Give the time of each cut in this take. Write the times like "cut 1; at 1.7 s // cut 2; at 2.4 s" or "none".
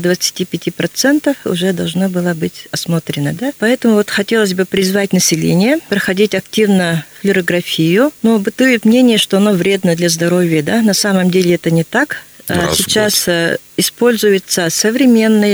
none